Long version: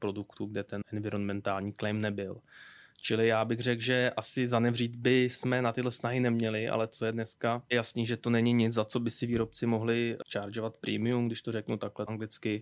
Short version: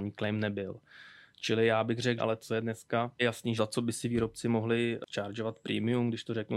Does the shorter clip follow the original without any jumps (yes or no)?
no